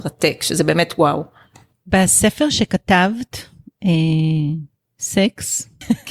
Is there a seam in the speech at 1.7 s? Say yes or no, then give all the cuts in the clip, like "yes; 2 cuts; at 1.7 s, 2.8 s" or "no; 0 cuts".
yes; 1 cut; at 1.7 s